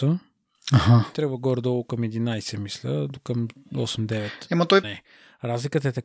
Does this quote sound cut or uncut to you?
cut